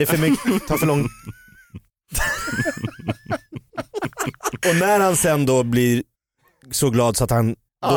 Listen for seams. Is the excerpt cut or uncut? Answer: cut